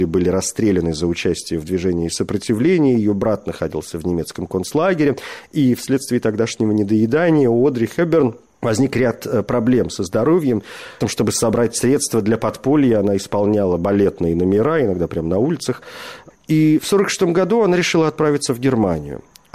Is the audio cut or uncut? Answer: cut